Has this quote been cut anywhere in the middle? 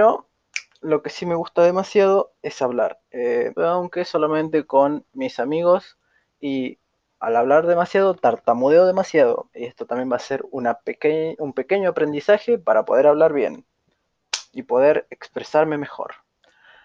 yes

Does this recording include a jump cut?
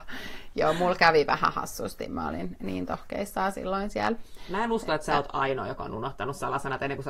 no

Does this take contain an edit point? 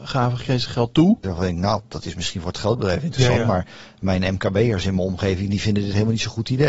yes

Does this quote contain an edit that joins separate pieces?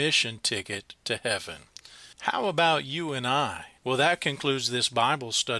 yes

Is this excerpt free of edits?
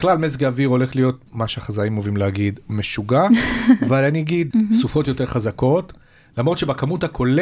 no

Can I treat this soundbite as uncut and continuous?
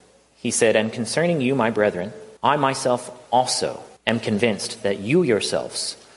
no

